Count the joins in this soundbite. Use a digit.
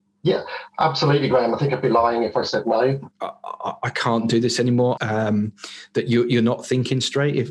2